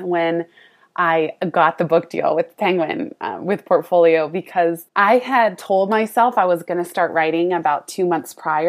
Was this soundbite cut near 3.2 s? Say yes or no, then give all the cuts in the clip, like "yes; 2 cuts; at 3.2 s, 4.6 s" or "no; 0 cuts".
no; 1 cut; at 4.9 s